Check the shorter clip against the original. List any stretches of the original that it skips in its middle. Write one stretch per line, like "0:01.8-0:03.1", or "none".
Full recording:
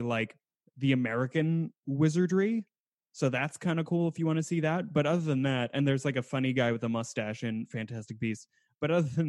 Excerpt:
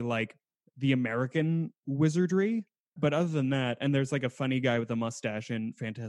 0:03.0-0:04.9